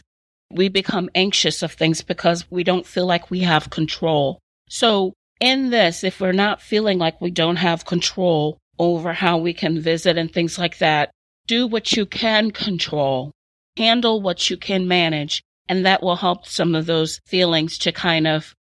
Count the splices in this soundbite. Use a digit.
0